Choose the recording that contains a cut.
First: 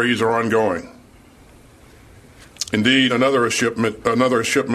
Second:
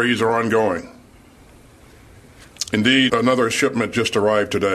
second; 1 cut; at 3.1 s

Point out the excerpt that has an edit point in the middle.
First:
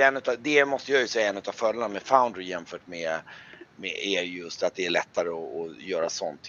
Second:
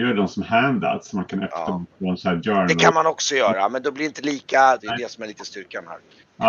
second; 1 cut; at 4.8 s

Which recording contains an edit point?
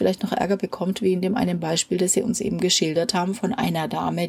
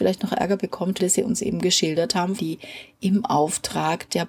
second; 2 cuts; at 1.0 s, 2.4 s

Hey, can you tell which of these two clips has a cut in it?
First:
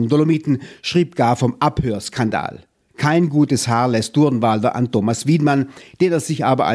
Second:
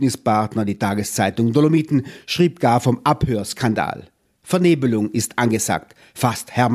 first; 1 cut; at 2.9 s

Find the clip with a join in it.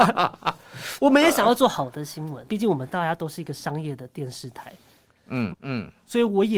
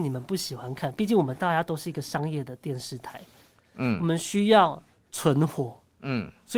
first; 2 cuts; at 2.5 s, 5.5 s

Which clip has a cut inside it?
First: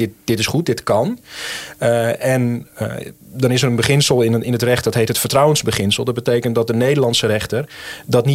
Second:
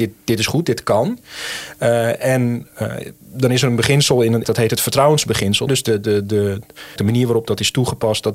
second; 3 cuts; at 4.4 s, 5.7 s, 7.0 s

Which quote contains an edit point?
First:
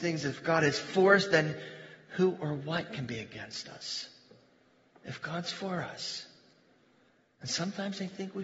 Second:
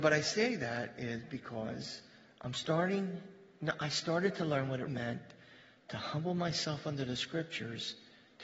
second; 1 cut; at 4.9 s

